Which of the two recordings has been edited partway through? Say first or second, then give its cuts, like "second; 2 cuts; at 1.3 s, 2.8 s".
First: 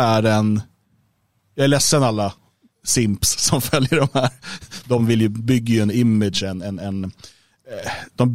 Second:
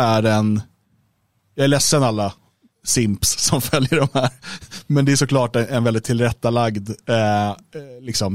first; 1 cut; at 4.8 s